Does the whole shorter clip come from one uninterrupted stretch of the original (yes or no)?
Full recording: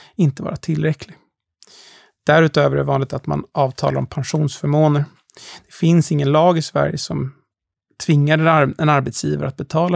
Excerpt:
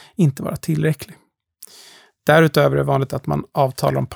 yes